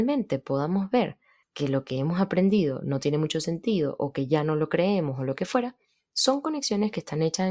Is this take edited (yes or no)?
no